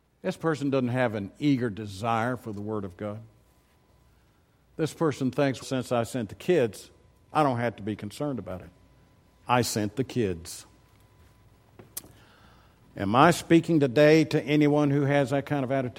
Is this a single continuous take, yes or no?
no